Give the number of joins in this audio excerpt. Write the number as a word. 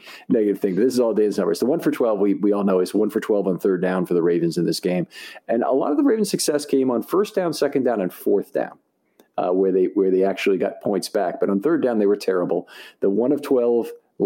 zero